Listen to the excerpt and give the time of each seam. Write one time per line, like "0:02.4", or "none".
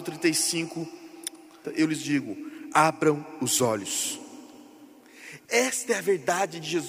0:01.6
0:05.5